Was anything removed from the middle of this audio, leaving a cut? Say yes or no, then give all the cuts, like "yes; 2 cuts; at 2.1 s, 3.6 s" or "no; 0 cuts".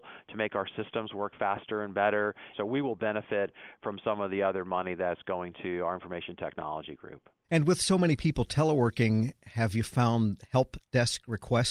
yes; 1 cut; at 2.5 s